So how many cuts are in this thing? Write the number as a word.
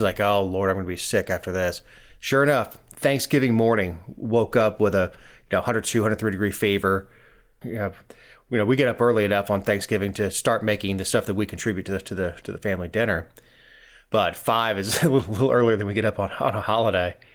one